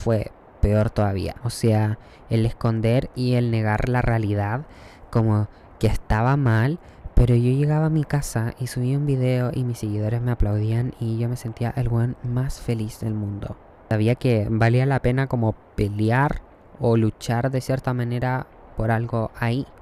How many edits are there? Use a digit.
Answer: 1